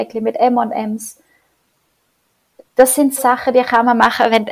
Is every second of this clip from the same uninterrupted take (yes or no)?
no